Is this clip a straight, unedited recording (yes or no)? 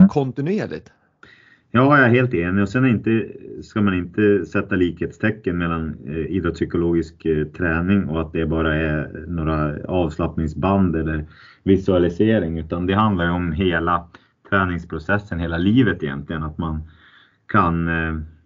yes